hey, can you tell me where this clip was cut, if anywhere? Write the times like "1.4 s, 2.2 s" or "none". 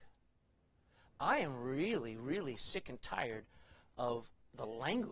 none